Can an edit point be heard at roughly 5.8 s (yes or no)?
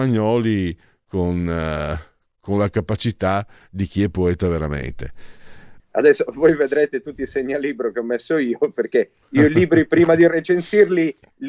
yes